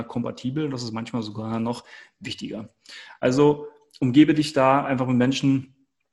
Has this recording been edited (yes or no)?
no